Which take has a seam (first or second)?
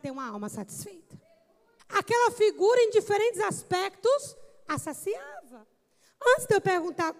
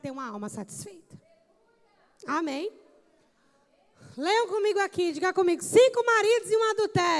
first